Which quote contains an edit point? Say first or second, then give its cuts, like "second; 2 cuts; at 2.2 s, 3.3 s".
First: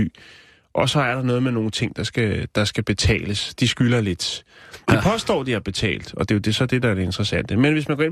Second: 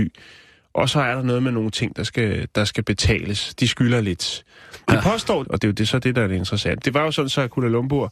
second; 2 cuts; at 5.4 s, 6.8 s